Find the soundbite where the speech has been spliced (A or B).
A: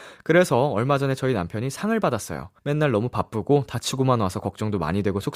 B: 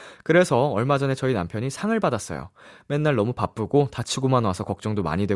A